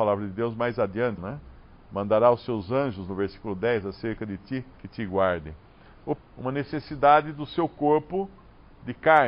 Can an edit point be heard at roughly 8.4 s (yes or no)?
no